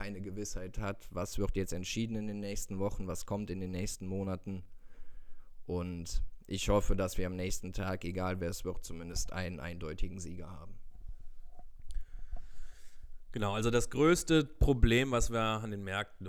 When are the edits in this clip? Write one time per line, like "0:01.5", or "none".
none